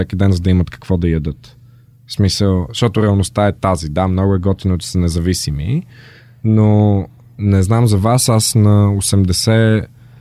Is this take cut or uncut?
uncut